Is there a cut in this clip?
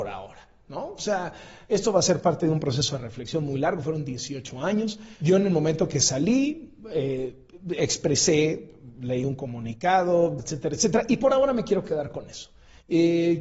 yes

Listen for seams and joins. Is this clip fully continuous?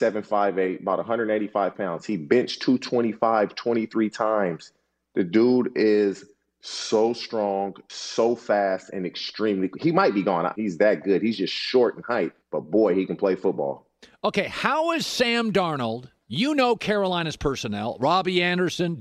no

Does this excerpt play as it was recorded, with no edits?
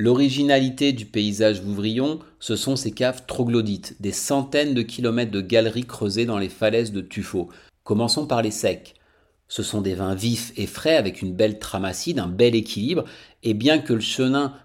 no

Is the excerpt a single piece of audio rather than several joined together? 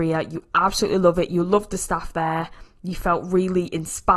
yes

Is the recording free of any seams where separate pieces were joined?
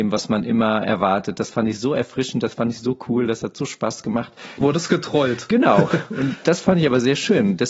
no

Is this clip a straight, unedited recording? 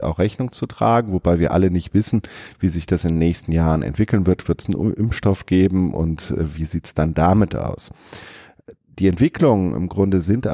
yes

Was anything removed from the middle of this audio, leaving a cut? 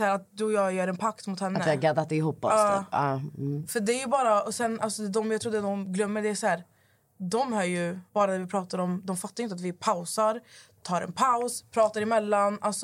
yes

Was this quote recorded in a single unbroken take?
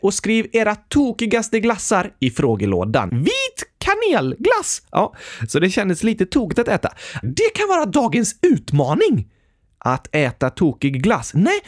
no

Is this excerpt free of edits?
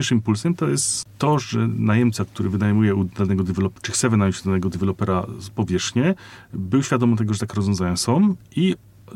yes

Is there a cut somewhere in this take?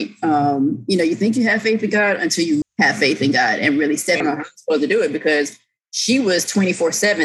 yes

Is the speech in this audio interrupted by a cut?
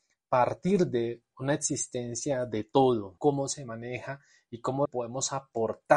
yes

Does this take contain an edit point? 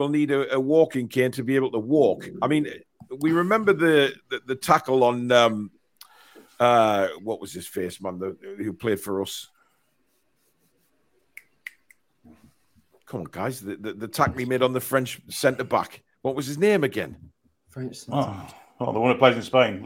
no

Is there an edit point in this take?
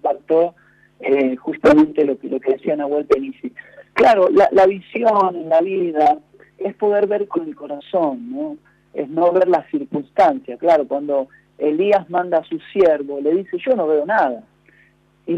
no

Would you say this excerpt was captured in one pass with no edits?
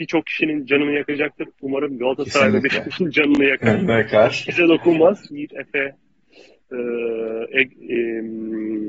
no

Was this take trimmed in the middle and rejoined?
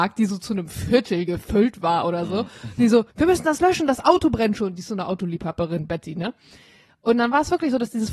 yes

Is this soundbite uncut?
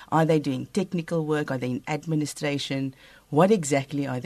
yes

